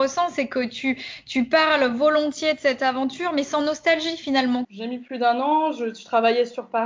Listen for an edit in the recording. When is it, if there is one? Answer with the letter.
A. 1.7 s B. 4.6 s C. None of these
B